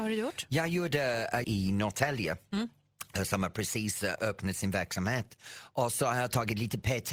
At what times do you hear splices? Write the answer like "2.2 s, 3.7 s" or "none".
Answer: 1.4 s